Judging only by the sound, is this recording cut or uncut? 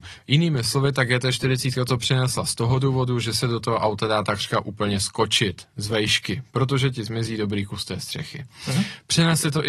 uncut